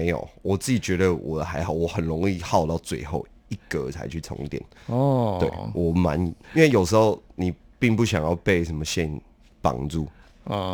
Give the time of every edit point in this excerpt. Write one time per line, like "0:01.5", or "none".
0:06.4